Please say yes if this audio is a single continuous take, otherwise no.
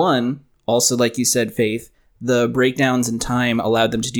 yes